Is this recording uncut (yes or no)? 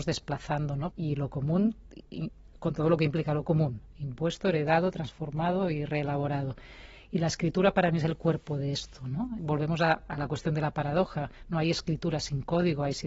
no